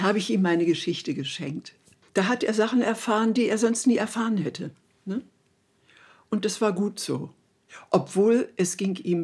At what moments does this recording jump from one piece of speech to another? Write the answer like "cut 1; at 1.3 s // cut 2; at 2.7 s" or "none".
cut 1; at 2.1 s